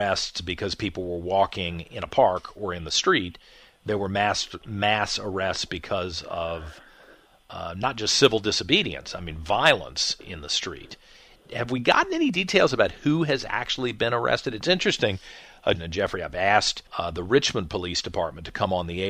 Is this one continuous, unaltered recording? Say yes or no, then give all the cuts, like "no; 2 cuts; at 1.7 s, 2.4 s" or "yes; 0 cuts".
no; 2 cuts; at 15.8 s, 16.9 s